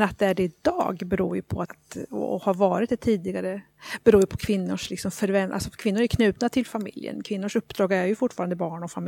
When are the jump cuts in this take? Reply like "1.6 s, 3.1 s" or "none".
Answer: 1.6 s

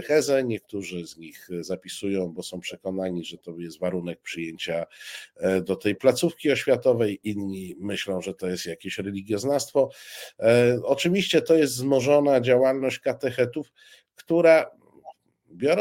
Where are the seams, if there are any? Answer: none

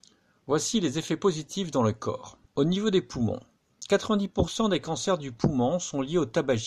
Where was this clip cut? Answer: 2.5 s

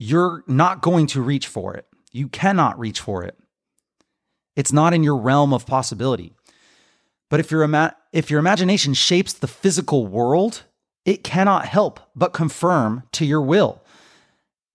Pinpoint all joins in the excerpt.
none

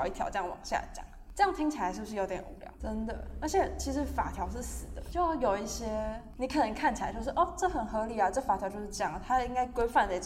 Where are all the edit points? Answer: 2.8 s, 5.1 s

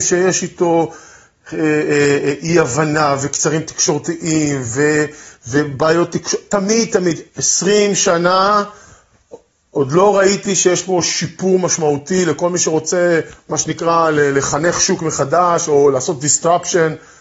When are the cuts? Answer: none

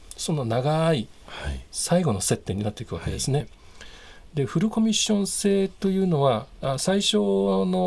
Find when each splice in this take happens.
3.4 s

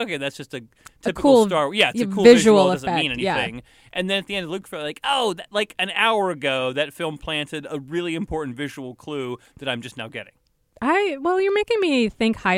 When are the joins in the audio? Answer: none

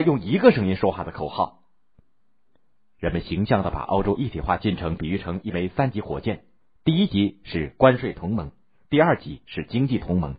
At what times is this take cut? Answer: none

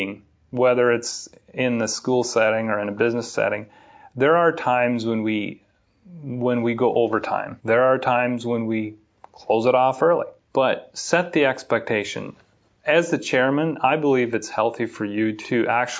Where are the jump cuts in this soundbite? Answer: none

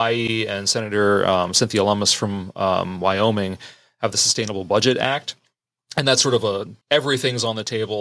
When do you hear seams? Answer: 6.8 s

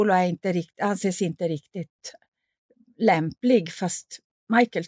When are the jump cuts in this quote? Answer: none

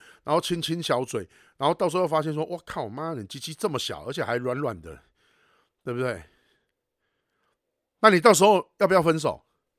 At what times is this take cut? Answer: none

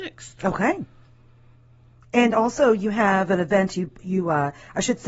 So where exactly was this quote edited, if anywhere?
none

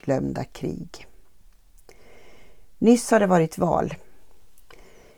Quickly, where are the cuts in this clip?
none

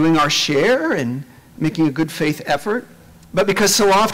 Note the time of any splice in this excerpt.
none

